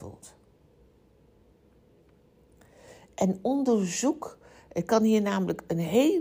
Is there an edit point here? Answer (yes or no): no